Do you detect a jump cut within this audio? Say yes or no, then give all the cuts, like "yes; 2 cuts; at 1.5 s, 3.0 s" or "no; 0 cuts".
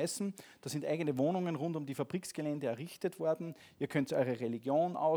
no; 0 cuts